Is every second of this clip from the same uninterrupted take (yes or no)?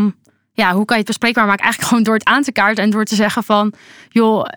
yes